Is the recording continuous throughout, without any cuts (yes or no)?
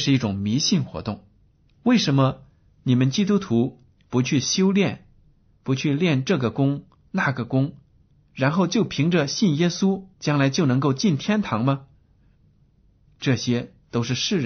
no